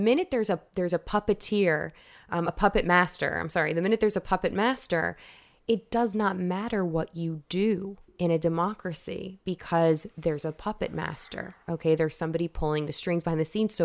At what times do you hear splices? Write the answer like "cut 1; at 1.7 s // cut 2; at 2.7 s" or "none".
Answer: none